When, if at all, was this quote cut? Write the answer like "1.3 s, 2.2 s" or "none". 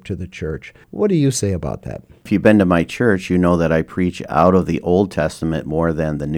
none